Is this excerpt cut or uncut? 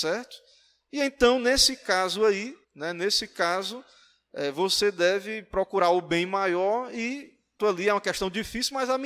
cut